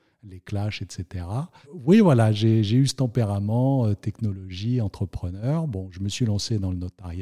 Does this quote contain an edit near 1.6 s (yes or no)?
yes